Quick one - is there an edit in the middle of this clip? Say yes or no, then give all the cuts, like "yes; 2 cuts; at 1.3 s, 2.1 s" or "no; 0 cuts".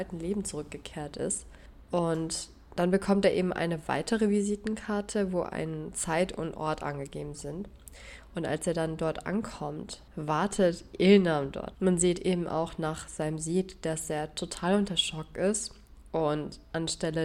yes; 2 cuts; at 10.1 s, 11.7 s